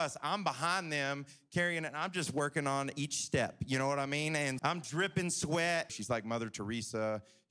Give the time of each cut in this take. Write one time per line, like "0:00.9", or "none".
0:04.6
0:05.9

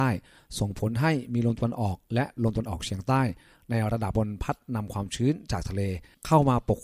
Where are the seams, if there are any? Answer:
0:04.1

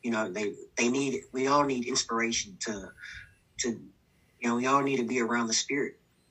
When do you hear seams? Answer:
none

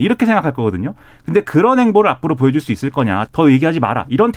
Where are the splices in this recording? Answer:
0:03.3

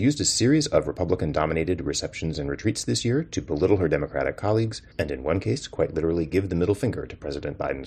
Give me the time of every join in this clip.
0:04.9

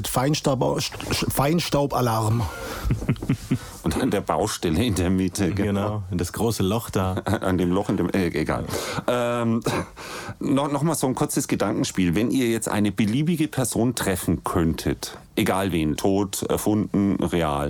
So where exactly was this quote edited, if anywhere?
0:15.9

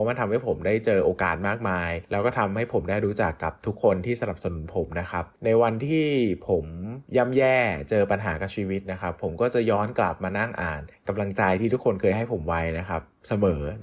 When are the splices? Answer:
0:07.1

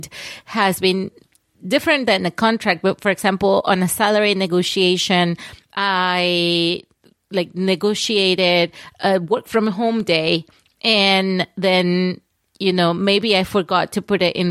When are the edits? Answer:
none

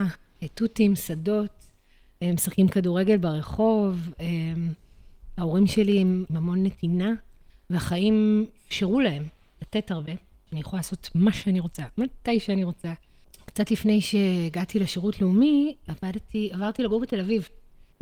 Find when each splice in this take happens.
0:06.3
0:10.5

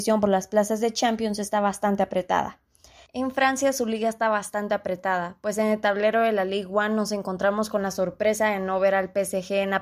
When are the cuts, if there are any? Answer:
0:03.1

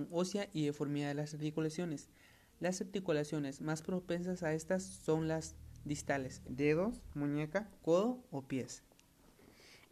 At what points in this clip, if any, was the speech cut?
0:06.4

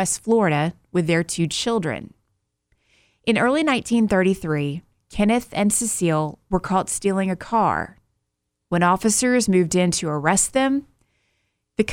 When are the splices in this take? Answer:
none

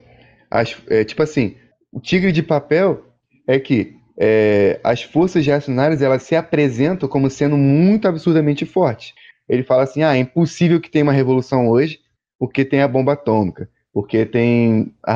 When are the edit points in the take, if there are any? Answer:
0:09.3

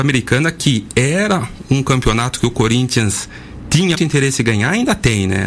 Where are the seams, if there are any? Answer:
0:03.9

